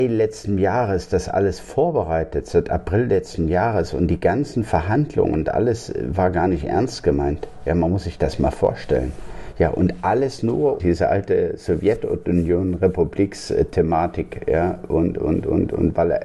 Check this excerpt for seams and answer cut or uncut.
cut